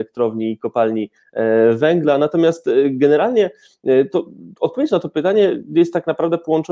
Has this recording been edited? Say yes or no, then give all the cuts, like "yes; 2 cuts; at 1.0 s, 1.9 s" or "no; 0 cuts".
no; 0 cuts